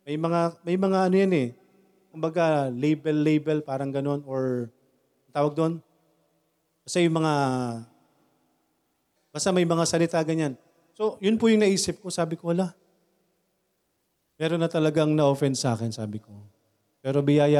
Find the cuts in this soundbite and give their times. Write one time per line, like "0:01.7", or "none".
0:02.1
0:09.2

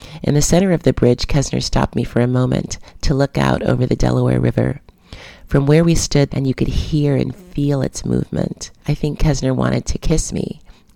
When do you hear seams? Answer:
0:06.3
0:08.8

